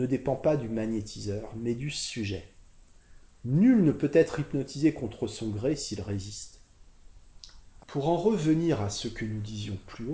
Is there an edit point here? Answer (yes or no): yes